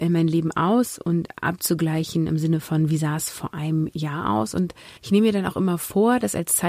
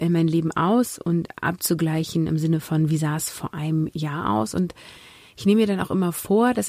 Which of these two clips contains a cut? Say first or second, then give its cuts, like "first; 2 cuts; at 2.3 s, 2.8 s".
first; 1 cut; at 5.0 s